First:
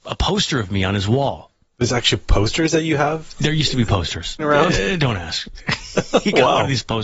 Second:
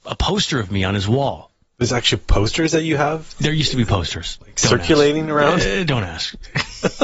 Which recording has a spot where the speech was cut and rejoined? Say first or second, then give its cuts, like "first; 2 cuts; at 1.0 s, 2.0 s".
first; 1 cut; at 4.4 s